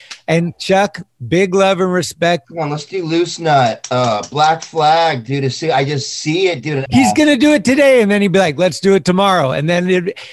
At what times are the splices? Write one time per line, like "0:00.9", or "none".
0:02.4
0:06.9